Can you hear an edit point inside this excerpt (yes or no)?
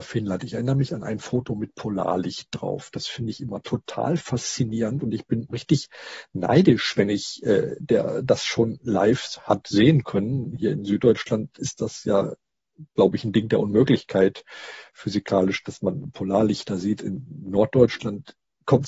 yes